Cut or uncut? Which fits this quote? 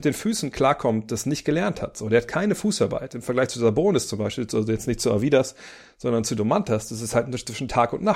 uncut